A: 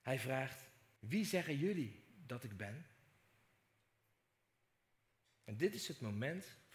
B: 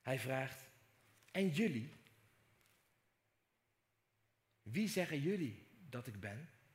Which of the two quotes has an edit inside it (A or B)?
A